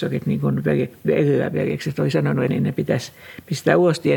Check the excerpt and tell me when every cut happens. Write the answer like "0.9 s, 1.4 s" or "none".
1.0 s, 2.5 s